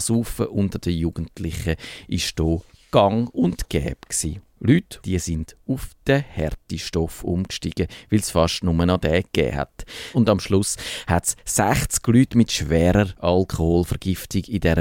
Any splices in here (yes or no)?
yes